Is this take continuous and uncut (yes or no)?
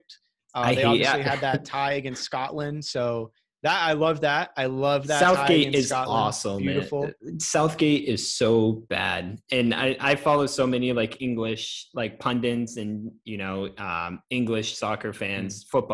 yes